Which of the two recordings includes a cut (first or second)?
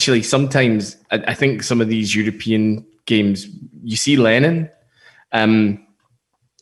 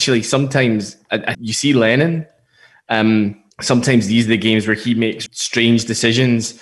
second